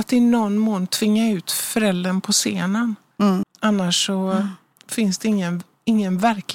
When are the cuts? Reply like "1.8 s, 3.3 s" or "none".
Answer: 3.4 s

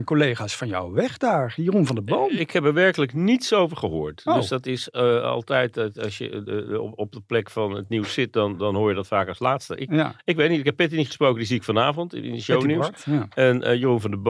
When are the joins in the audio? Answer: none

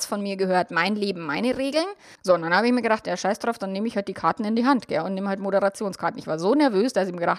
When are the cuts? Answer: 2.2 s

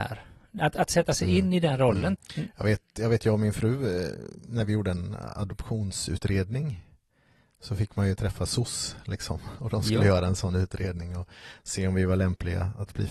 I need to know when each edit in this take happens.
2.2 s

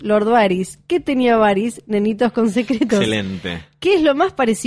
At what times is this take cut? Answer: none

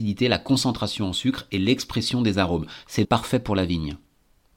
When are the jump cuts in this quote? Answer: 3.0 s

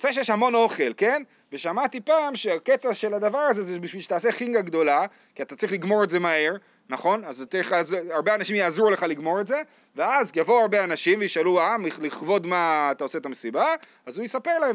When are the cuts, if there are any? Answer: 7.5 s

